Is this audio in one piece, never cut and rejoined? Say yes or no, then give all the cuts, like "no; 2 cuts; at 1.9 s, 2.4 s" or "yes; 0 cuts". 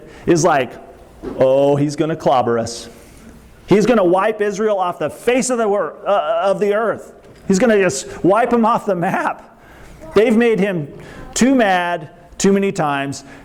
yes; 0 cuts